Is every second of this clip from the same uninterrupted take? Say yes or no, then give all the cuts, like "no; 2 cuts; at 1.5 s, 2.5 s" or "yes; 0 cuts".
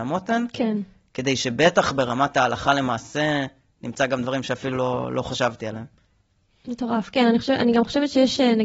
yes; 0 cuts